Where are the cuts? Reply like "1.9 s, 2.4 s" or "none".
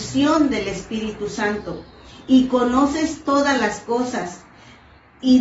none